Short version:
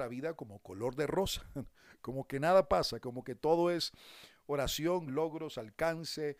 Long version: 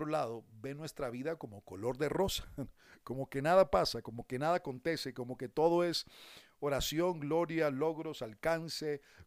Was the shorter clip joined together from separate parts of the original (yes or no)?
yes